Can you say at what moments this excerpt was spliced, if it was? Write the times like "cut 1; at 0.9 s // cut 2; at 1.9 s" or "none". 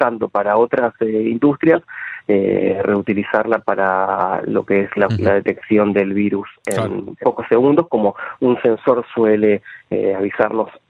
cut 1; at 7.2 s